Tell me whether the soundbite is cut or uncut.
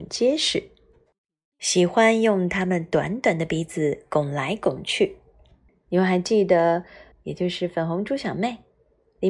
cut